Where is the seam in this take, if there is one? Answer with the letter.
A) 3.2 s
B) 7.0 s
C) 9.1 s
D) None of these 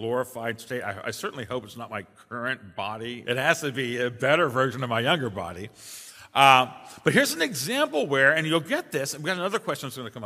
A